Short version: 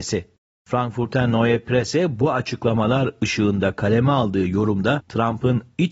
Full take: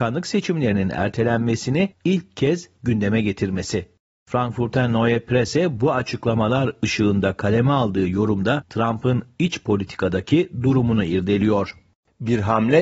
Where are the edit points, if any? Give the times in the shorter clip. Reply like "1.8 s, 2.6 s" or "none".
none